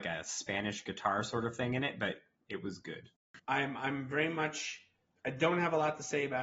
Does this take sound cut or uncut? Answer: cut